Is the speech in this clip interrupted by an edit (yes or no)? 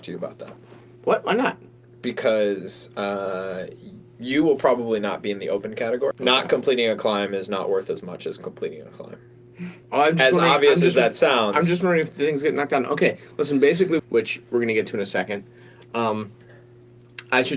yes